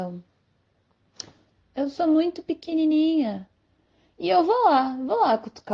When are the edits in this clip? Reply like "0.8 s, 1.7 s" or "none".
1.6 s